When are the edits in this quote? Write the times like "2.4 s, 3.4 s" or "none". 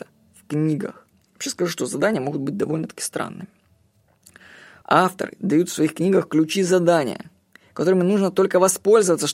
1.1 s, 4.8 s